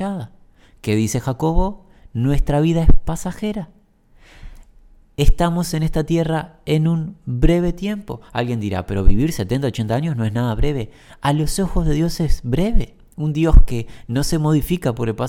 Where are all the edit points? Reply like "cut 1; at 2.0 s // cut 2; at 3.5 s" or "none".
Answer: none

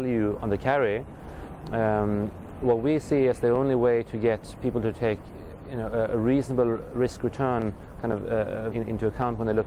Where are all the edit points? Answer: cut 1; at 8.7 s

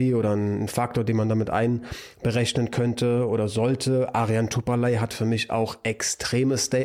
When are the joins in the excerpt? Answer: none

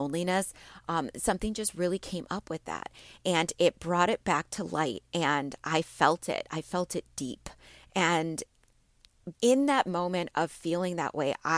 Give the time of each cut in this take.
cut 1; at 7.9 s // cut 2; at 9.4 s

